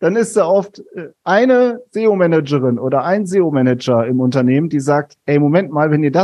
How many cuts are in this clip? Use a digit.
0